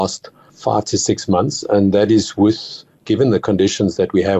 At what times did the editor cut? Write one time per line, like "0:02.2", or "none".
none